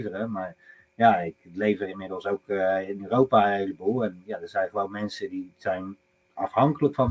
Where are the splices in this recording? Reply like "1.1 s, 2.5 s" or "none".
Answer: none

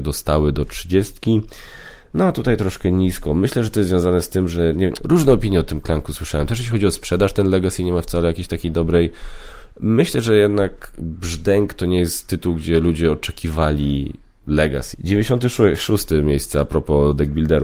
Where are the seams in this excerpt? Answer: 5.0 s, 14.9 s

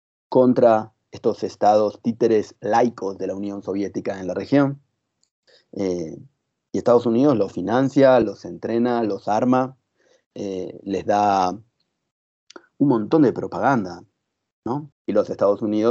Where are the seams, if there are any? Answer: 8.2 s, 14.9 s

